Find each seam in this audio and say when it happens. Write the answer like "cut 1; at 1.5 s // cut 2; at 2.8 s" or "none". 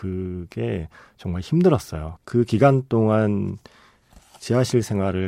cut 1; at 2.2 s